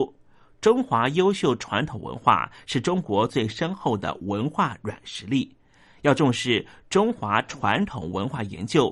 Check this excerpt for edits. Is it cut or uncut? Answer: uncut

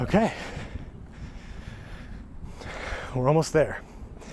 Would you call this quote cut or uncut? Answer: uncut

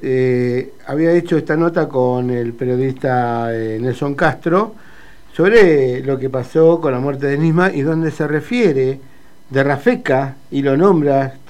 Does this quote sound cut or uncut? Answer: uncut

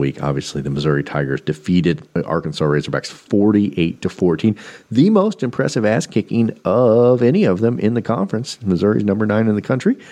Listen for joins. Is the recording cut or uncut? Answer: uncut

